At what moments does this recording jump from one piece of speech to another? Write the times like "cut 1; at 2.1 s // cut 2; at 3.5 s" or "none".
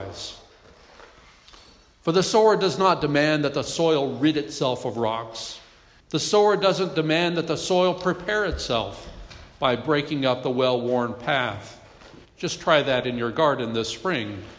cut 1; at 6.0 s // cut 2; at 12.3 s